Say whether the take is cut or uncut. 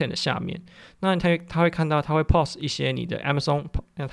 uncut